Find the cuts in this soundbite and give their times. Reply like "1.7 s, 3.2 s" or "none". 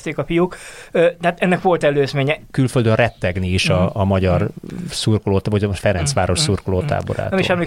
2.5 s